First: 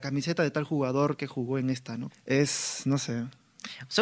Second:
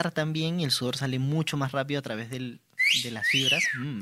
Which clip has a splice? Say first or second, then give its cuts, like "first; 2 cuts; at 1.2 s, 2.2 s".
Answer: first; 1 cut; at 2.1 s